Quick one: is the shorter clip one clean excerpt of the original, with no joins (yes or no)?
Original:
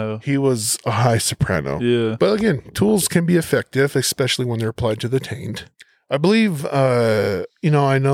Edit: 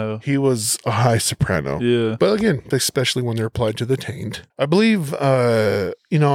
no